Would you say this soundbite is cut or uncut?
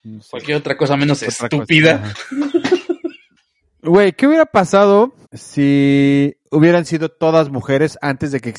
cut